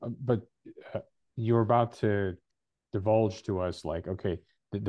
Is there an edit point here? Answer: no; 0 cuts

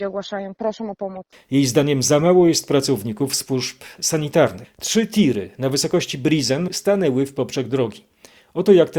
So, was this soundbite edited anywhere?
yes; 3 cuts; at 1.3 s, 4.6 s, 6.7 s

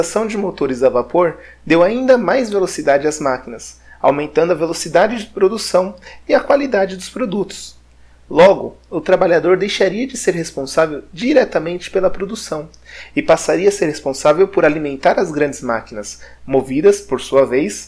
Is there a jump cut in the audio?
no; 0 cuts

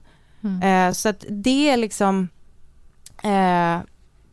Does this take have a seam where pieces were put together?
no; 0 cuts

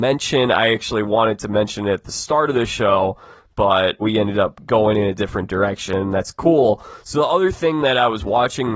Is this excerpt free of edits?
no; 1 cut; at 4.0 s

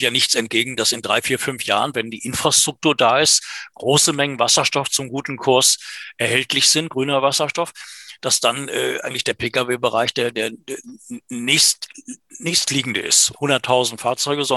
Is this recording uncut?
no; 1 cut; at 13.3 s

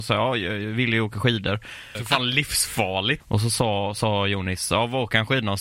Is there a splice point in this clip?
yes; 2 cuts; at 2.0 s, 3.2 s

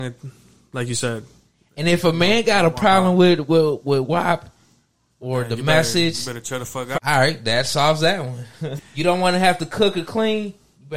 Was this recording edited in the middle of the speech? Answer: yes; 2 cuts; at 7.0 s, 8.8 s

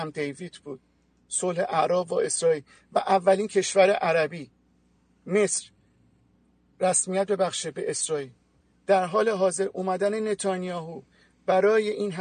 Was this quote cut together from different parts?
no; 0 cuts

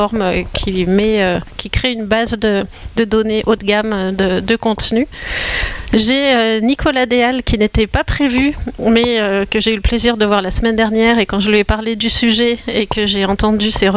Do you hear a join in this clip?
no; 0 cuts

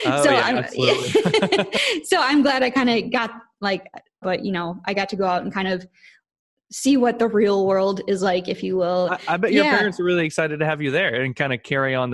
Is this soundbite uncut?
no; 2 cuts; at 4.2 s, 9.1 s

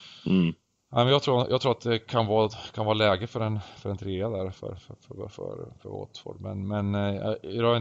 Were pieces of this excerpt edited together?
no; 0 cuts

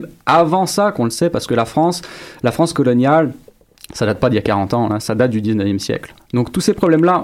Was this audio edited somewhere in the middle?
no; 0 cuts

